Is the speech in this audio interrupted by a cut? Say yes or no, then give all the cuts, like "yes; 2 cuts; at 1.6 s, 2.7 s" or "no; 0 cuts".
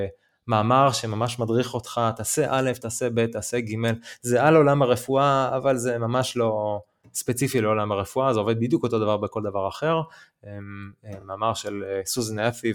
no; 0 cuts